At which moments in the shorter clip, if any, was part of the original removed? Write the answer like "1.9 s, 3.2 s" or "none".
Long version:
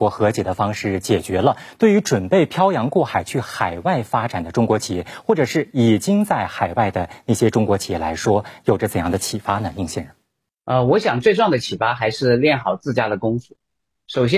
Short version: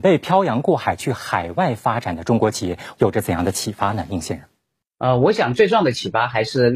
2.9 s